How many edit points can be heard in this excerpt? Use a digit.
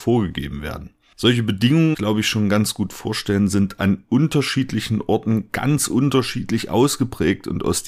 1